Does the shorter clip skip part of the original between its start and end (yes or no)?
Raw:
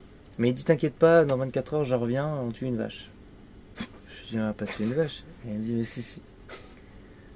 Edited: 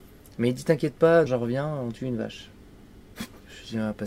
yes